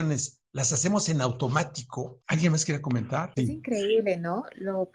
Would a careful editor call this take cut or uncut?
cut